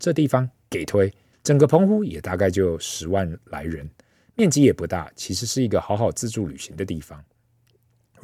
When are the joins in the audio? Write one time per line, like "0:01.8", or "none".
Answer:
0:01.3